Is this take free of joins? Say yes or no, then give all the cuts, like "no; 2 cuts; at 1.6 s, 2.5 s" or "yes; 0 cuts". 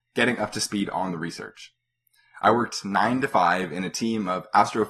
yes; 0 cuts